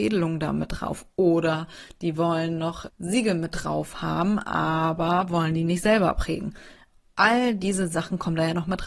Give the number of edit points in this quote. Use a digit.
1